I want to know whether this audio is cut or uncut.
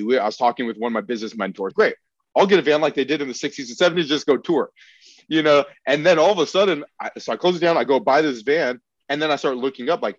cut